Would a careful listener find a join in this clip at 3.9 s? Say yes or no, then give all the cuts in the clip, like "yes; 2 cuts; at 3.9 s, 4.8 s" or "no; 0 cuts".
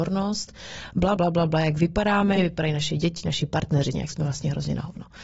yes; 3 cuts; at 1.2 s, 2.4 s, 3.9 s